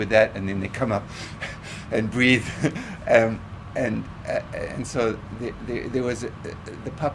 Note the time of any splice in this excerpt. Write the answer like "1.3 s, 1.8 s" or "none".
none